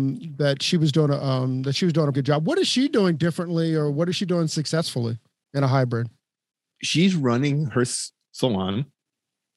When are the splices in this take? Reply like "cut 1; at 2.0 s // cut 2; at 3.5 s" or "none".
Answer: cut 1; at 2.1 s